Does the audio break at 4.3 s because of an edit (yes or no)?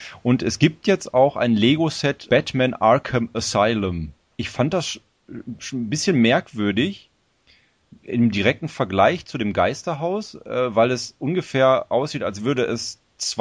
yes